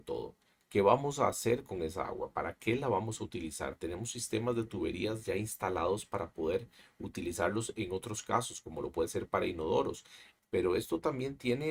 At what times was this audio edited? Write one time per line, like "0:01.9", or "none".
0:10.4